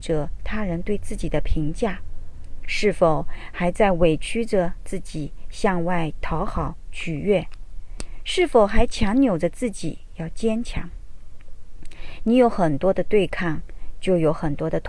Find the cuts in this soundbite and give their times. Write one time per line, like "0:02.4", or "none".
none